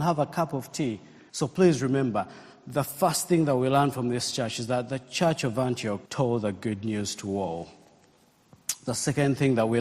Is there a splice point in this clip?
yes; 2 cuts; at 1.3 s, 6.1 s

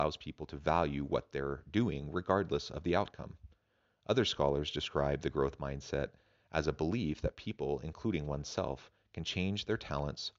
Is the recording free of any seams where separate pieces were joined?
yes; 0 cuts

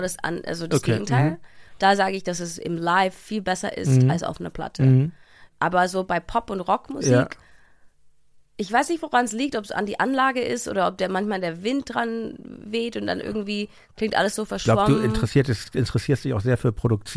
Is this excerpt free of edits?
yes; 0 cuts

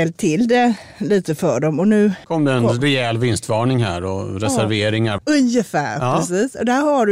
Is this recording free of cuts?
no; 2 cuts; at 2.2 s, 5.2 s

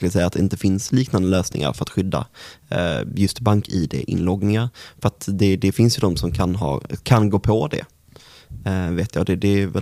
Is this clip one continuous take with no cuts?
yes; 0 cuts

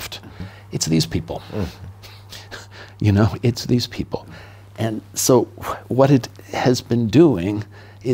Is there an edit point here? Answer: no; 0 cuts

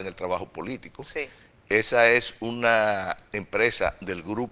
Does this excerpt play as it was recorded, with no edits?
yes; 0 cuts

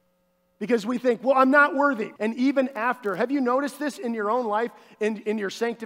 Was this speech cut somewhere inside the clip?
yes; 1 cut; at 2.2 s

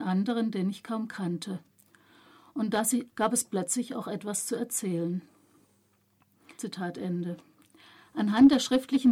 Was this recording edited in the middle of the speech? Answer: yes; 2 cuts; at 3.1 s, 6.5 s

